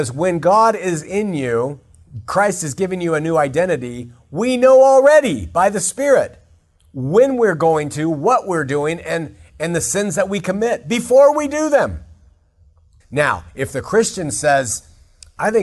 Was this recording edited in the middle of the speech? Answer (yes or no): yes